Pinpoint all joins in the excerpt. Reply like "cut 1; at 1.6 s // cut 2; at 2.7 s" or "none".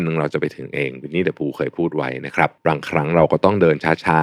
cut 1; at 2.6 s